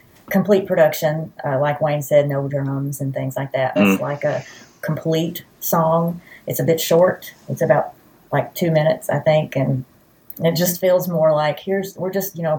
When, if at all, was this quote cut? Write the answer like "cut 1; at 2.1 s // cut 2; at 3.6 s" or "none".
cut 1; at 3.8 s